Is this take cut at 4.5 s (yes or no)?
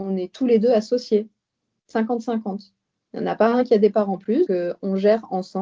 yes